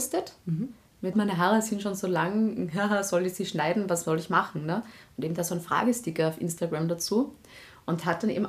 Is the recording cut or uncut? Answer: cut